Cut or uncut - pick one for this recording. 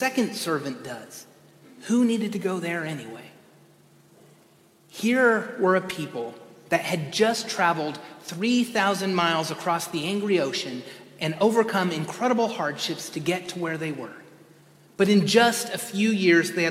cut